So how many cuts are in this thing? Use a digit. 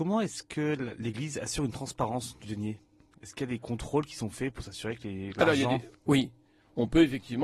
1